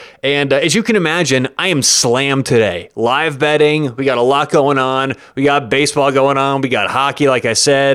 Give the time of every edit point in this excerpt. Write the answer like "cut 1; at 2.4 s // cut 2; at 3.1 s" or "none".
none